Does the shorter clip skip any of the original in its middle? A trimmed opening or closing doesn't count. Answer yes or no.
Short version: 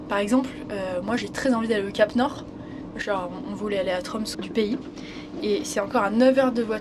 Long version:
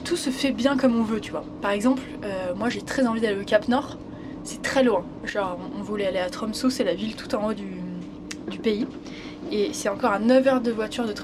yes